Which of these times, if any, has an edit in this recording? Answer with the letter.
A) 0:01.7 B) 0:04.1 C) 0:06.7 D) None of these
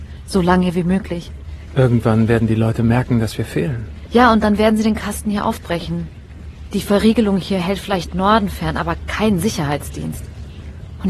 A